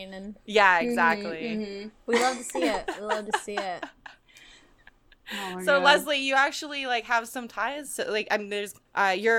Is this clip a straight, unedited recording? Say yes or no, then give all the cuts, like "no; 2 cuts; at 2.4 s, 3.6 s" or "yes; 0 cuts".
yes; 0 cuts